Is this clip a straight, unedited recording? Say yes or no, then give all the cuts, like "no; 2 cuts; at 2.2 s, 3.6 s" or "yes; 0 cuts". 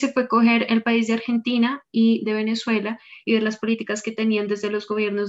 yes; 0 cuts